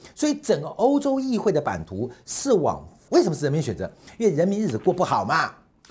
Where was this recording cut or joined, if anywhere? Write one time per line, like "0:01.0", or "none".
0:03.1